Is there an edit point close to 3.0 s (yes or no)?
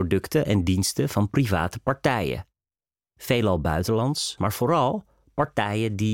no